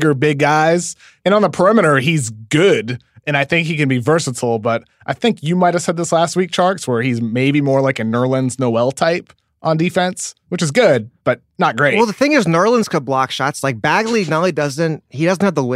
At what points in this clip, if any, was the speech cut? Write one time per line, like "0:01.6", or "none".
none